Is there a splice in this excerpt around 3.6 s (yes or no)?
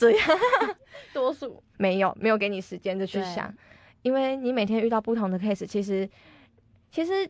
no